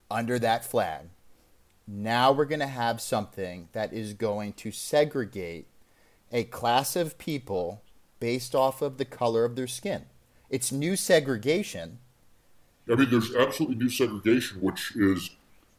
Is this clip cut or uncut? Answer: cut